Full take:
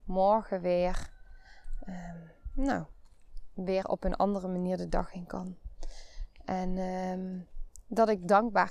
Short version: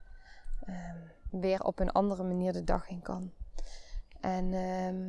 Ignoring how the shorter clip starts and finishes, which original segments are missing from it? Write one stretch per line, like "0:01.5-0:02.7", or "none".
0:02.5-0:03.5